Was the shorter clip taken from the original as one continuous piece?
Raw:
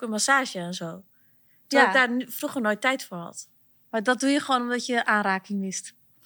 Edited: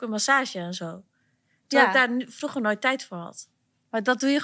yes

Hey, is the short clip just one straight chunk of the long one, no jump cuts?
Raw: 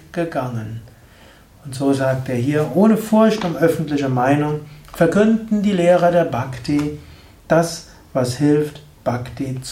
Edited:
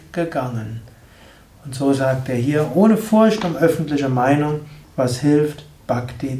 no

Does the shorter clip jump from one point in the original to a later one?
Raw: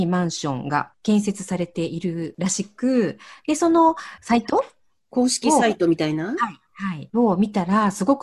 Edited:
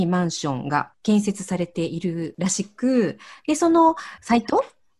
no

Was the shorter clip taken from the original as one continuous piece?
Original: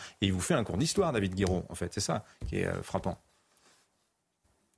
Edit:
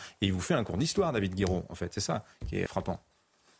no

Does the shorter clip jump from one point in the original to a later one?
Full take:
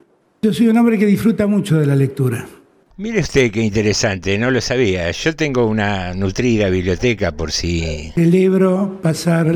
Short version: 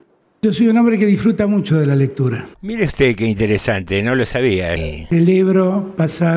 yes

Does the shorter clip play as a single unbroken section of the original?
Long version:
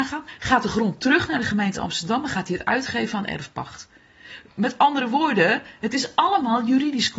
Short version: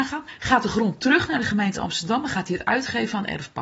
yes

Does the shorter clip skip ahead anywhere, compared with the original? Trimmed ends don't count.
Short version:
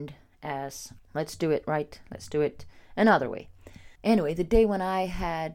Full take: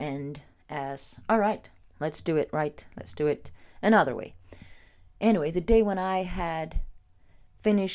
yes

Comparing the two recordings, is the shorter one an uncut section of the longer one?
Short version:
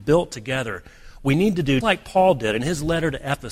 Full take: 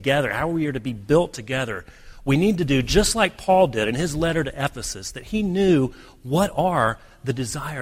no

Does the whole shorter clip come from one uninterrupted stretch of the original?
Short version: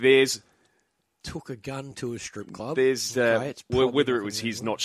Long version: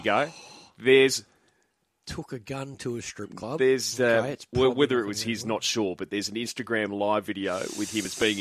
yes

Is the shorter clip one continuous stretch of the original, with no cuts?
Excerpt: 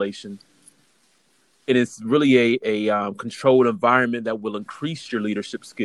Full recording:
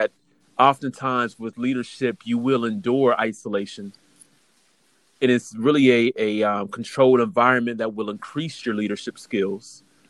yes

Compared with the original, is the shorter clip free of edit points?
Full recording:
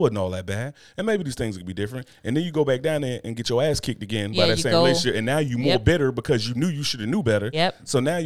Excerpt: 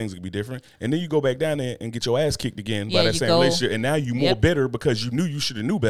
yes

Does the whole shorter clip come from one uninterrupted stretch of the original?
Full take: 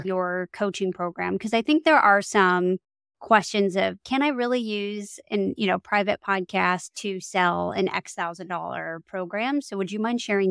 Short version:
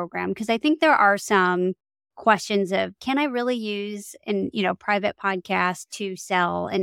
yes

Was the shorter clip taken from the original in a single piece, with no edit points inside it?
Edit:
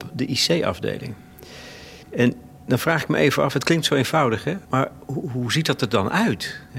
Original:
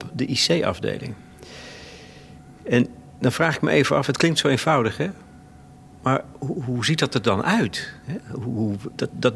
no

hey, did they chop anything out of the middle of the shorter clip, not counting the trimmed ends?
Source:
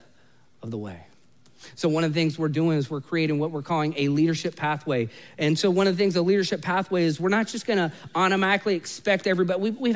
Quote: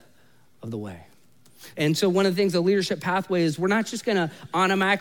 yes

